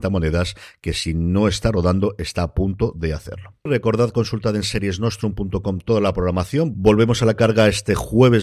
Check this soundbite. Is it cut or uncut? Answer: cut